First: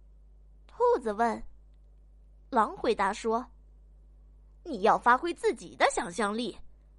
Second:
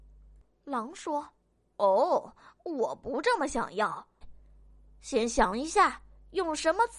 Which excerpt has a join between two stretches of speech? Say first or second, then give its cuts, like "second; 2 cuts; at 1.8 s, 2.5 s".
second; 1 cut; at 4.2 s